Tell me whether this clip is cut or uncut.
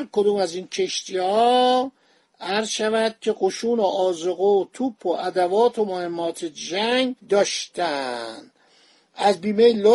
cut